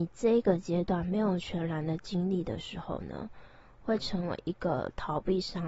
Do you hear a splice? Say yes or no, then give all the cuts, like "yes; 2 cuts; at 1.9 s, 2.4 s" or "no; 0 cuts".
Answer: no; 0 cuts